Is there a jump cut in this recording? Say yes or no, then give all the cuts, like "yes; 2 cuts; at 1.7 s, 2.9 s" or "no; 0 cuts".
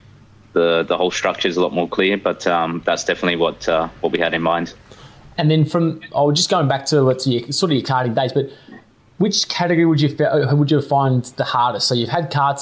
no; 0 cuts